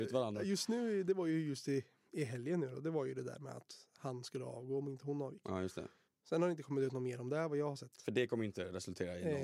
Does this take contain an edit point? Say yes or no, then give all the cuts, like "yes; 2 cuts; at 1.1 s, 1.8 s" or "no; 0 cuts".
no; 0 cuts